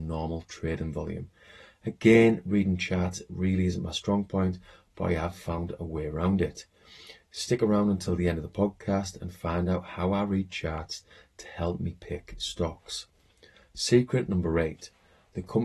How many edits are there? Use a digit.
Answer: 0